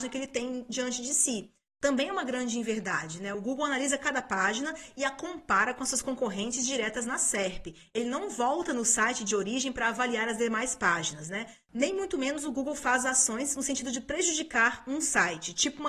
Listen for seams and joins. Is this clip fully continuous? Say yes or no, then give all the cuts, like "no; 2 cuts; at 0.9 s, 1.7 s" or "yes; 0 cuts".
yes; 0 cuts